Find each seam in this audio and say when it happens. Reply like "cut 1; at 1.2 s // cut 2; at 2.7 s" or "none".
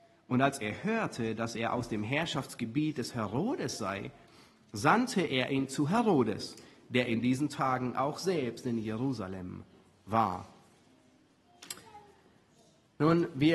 none